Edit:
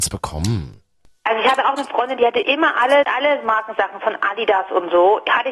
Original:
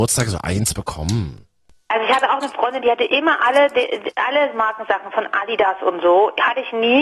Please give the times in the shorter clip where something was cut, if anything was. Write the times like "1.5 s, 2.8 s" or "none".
3.0 s